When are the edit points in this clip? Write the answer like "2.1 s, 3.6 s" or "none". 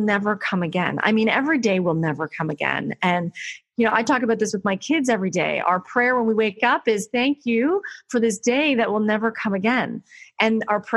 none

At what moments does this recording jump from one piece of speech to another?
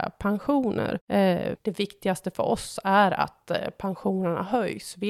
1.5 s

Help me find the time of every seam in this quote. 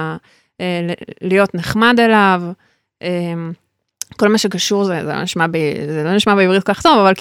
none

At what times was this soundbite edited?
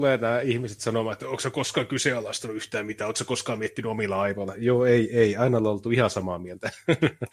none

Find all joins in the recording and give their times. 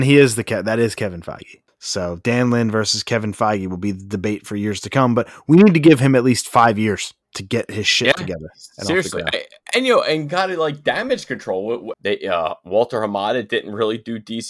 1.7 s, 7.2 s, 11.9 s

